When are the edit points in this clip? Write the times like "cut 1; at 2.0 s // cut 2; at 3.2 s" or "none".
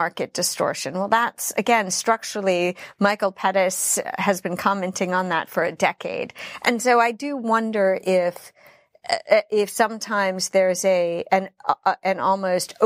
none

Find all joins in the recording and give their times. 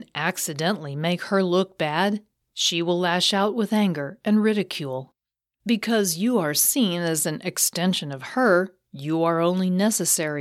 cut 1; at 2.5 s // cut 2; at 5.5 s

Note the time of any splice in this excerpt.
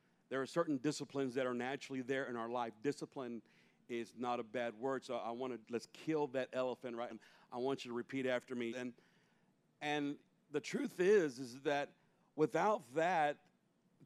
cut 1; at 5.6 s // cut 2; at 7.1 s // cut 3; at 8.7 s

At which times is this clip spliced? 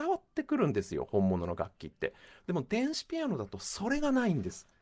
none

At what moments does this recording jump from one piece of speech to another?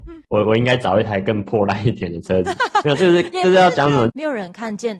cut 1; at 4.1 s

